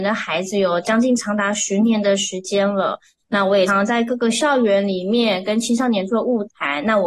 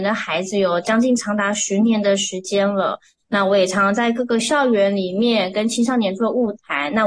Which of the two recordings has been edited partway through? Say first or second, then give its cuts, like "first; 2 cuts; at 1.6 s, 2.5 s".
first; 1 cut; at 3.7 s